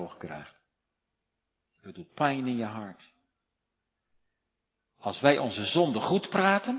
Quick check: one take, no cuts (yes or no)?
no